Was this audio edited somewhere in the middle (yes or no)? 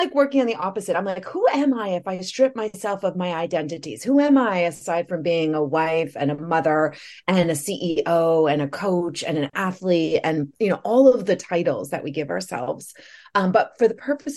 no